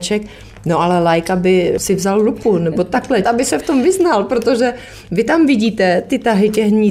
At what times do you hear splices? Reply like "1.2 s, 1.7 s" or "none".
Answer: 3.2 s